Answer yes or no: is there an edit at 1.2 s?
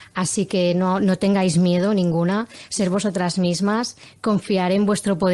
no